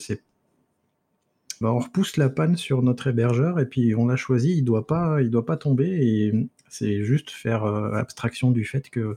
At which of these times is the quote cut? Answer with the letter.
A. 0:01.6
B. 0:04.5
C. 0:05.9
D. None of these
A